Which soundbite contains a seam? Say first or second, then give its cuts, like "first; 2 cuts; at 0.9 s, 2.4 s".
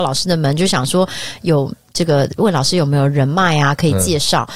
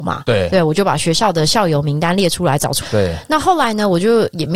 second; 1 cut; at 2.8 s